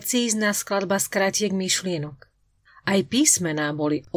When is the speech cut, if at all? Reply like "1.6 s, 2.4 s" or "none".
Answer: none